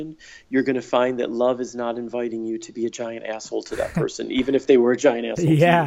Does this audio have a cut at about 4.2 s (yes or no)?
no